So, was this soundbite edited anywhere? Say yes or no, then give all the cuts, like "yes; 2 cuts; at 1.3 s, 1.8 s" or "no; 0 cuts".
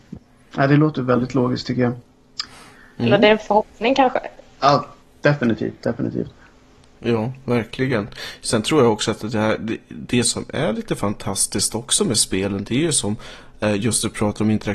no; 0 cuts